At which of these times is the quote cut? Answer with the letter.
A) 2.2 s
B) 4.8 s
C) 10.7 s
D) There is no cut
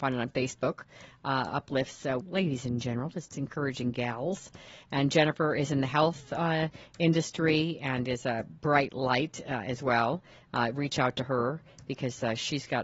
A